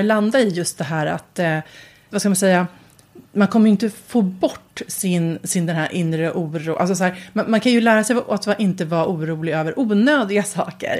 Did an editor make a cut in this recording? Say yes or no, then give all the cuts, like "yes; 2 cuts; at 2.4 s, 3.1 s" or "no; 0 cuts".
yes; 1 cut; at 2.1 s